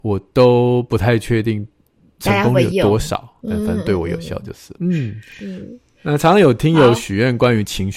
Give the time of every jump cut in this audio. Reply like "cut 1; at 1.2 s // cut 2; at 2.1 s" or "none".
cut 1; at 3.4 s // cut 2; at 4.8 s